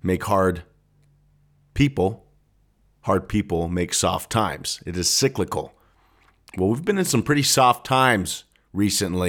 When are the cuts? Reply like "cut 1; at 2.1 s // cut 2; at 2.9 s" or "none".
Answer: none